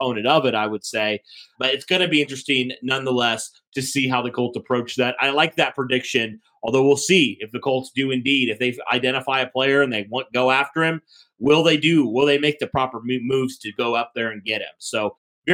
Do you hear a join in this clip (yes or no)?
yes